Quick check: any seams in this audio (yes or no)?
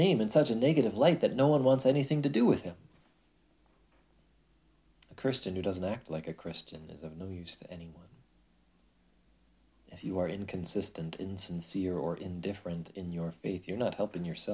no